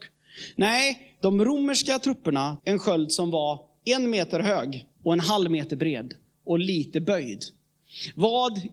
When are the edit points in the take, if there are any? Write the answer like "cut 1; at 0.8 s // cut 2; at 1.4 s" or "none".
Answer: cut 1; at 2.6 s // cut 2; at 4.9 s